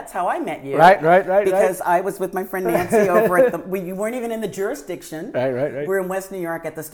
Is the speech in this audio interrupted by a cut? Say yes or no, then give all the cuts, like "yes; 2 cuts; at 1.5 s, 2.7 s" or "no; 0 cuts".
no; 0 cuts